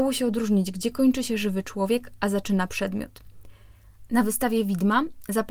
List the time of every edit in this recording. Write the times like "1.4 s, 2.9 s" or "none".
4.1 s